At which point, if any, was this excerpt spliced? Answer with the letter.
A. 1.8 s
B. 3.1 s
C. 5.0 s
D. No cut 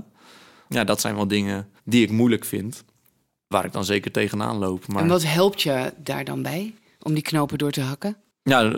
A